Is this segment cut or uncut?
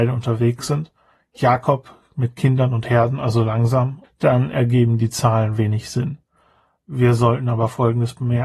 cut